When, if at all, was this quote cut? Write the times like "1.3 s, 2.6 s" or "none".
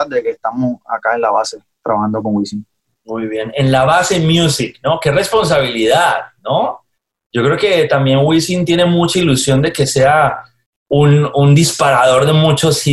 none